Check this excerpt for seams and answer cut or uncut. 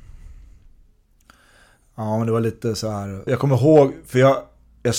cut